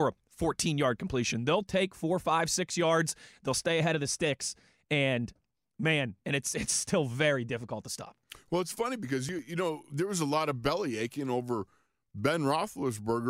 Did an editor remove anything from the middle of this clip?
yes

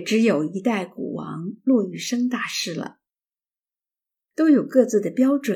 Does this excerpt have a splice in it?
yes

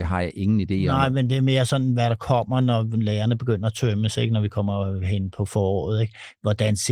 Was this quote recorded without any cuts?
yes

